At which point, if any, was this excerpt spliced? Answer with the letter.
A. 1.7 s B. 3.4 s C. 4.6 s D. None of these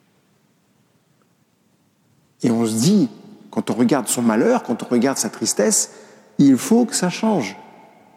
D